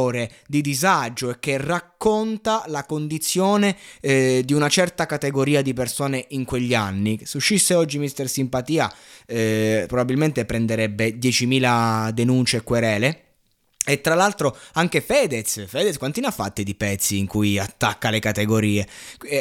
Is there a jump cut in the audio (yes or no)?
no